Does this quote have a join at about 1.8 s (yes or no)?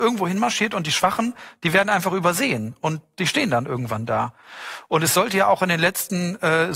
no